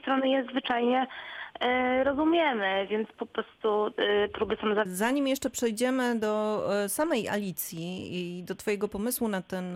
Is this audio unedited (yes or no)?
no